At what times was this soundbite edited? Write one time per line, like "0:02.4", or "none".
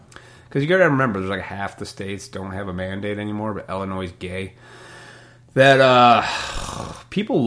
none